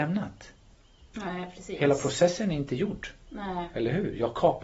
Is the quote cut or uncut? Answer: uncut